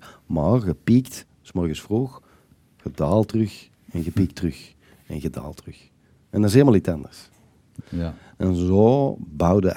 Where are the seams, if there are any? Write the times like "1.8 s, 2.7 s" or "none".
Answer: 7.8 s